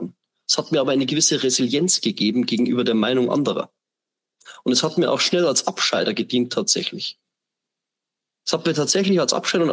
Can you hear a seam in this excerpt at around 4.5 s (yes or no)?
no